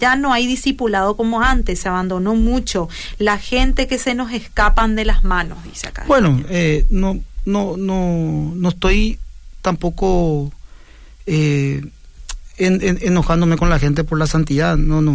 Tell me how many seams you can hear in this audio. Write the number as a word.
zero